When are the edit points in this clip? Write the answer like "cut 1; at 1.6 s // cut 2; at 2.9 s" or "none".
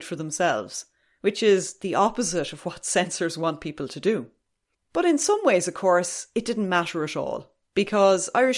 cut 1; at 4.7 s